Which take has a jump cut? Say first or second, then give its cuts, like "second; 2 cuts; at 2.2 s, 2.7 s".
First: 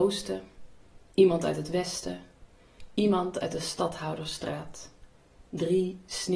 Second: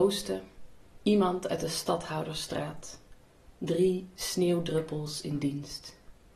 second; 1 cut; at 1.0 s